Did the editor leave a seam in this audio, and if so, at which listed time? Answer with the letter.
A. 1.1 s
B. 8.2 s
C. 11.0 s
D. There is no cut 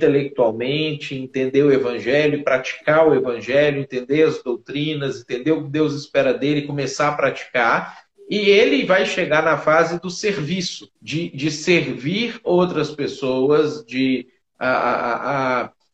C